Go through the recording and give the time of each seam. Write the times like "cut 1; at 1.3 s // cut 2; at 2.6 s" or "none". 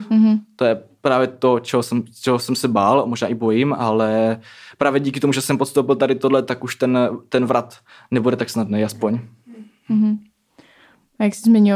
none